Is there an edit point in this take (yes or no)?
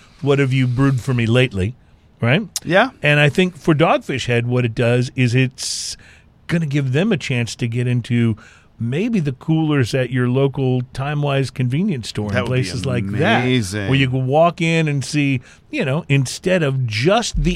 no